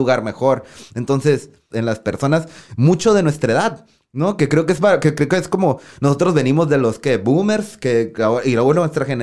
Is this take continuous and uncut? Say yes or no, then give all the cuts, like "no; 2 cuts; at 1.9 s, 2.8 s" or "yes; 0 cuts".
no; 1 cut; at 1.7 s